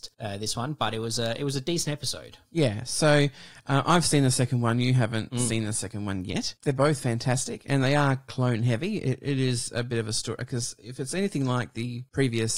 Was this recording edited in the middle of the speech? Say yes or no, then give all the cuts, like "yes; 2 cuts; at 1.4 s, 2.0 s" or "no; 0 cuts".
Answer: no; 0 cuts